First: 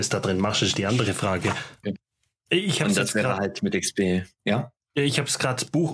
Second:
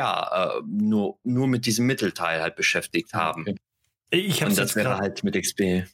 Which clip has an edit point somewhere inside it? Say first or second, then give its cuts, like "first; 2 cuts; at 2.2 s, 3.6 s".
first; 1 cut; at 1.8 s